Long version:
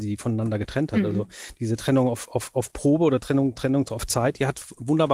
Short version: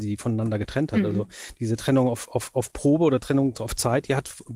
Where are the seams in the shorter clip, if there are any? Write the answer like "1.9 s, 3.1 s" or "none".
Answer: 3.5 s